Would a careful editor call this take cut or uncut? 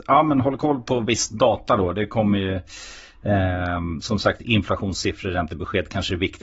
uncut